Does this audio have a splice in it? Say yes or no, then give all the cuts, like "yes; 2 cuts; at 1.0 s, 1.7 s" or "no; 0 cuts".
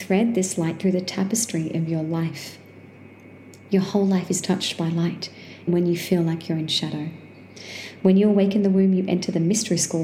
yes; 2 cuts; at 5.7 s, 8.0 s